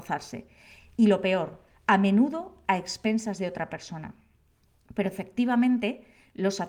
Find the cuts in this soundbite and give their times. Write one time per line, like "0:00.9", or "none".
none

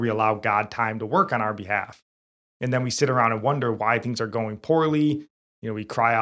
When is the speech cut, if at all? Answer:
none

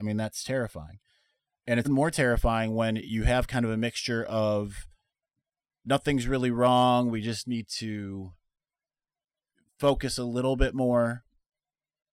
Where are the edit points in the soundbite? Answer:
0:01.8

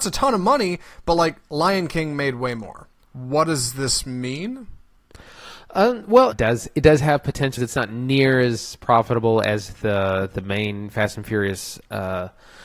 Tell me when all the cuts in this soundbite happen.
0:03.0
0:06.3
0:07.6

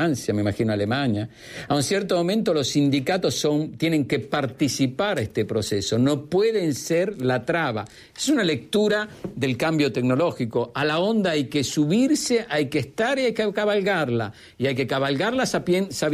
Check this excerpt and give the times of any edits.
none

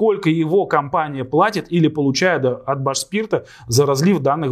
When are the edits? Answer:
none

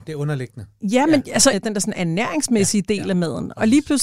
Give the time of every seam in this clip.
0:01.5

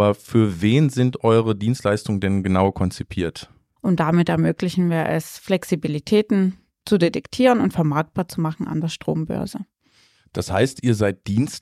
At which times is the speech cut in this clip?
0:03.8

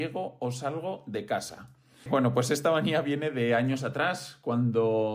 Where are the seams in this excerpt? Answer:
0:02.1

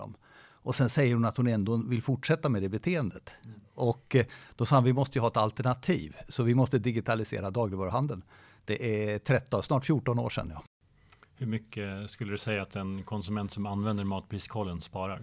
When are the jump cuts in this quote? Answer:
none

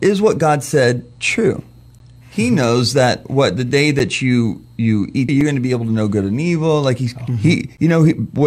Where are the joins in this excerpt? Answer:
0:05.3
0:07.3

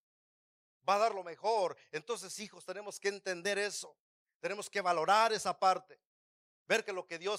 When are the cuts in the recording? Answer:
none

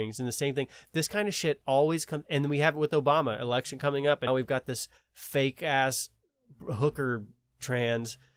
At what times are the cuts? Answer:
0:04.3

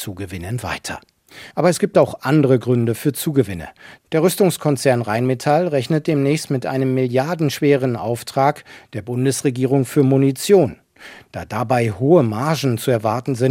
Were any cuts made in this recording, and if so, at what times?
0:01.5

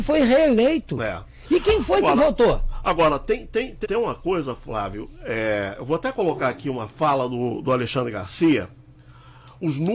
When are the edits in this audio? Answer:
0:03.8

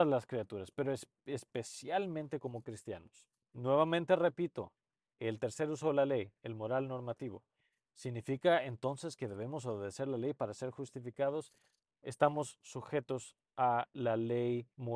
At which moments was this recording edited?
0:11.8

